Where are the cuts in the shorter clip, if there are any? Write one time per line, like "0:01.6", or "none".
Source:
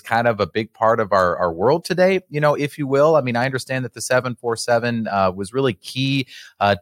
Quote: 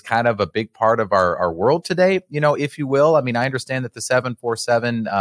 none